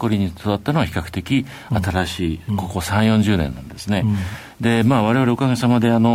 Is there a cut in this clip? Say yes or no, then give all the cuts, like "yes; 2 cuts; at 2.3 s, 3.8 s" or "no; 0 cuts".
no; 0 cuts